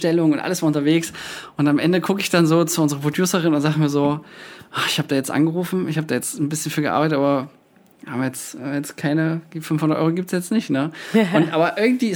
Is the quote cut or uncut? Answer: uncut